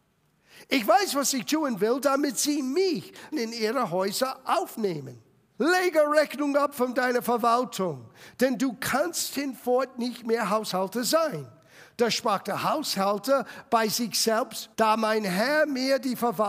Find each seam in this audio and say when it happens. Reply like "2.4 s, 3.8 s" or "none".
3.3 s, 5.6 s, 14.7 s